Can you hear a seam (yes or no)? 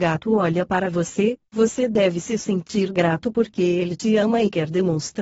no